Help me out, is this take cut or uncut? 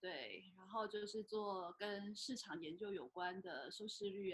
uncut